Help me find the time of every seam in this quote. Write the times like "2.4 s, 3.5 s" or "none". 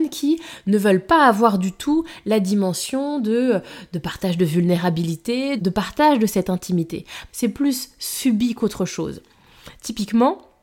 5.6 s, 7.3 s